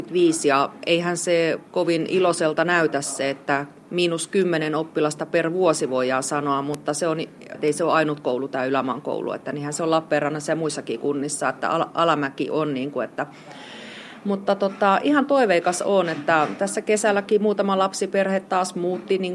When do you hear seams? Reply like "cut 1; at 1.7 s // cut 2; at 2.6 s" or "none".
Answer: cut 1; at 1.7 s // cut 2; at 7.5 s